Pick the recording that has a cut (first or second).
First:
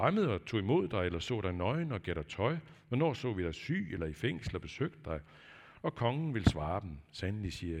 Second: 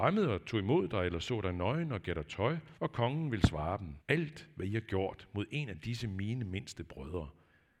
second